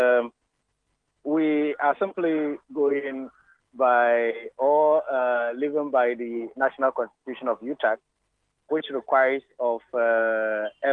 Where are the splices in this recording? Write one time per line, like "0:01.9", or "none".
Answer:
0:08.7